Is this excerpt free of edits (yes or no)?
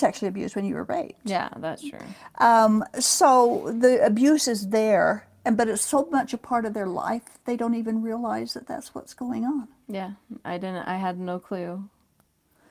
yes